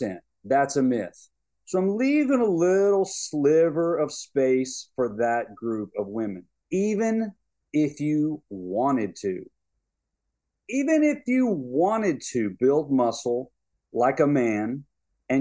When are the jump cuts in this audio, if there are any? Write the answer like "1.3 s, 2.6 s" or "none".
1.5 s, 6.6 s